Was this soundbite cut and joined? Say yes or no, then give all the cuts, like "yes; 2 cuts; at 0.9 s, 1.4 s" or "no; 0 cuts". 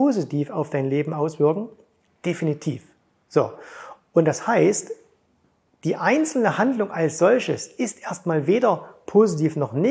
no; 0 cuts